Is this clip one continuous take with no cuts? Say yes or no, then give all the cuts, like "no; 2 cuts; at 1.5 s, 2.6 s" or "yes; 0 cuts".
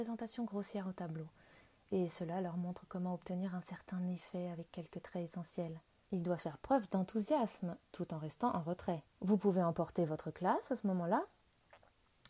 no; 2 cuts; at 6.1 s, 9.1 s